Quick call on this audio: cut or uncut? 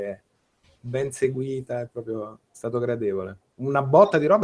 cut